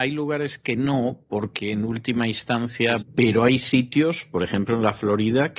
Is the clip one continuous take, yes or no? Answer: no